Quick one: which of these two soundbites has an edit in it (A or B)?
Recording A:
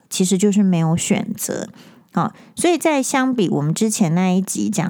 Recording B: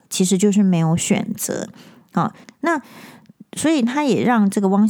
B